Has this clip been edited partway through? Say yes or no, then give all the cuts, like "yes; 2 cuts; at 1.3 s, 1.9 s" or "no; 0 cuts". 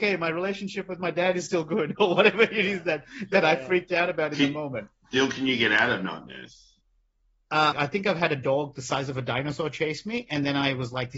yes; 1 cut; at 7.7 s